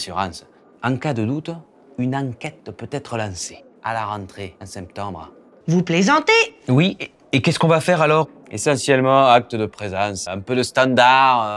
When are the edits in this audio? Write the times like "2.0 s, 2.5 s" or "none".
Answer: 5.6 s, 10.3 s